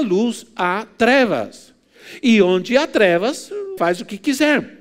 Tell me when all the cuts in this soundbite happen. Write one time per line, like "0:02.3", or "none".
0:03.8